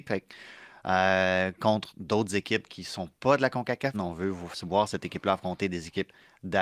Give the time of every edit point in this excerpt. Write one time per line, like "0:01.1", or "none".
0:03.9

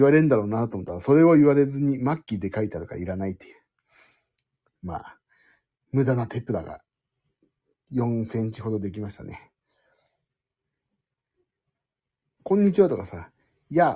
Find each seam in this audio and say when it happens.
0:04.7
0:12.4

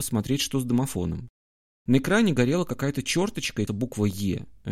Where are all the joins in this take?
0:03.7

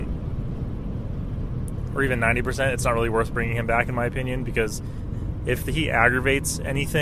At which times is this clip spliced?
none

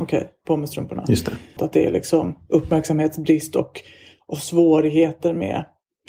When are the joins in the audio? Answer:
0:01.6

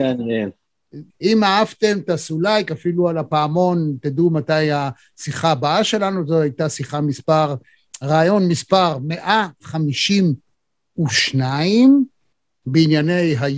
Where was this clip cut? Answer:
0:01.1

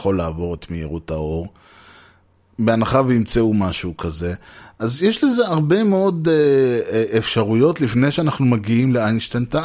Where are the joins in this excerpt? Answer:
none

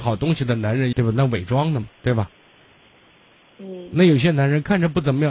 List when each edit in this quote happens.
0:00.9

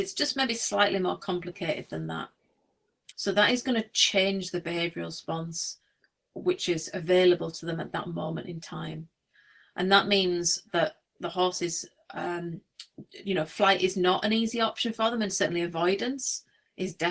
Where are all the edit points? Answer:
0:03.1

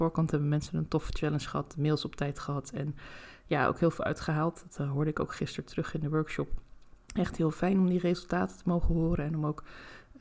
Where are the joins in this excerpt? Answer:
0:07.0

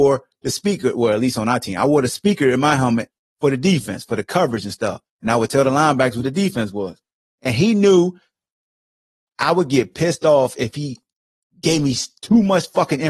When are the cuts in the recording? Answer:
none

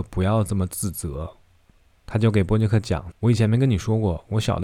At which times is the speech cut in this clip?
0:03.1

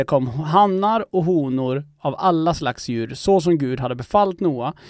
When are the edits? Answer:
none

